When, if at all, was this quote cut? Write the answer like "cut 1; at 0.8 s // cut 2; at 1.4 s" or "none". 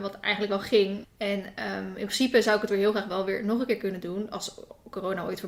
cut 1; at 1.0 s